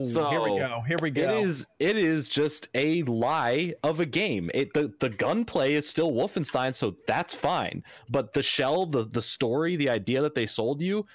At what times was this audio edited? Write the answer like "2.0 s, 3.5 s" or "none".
none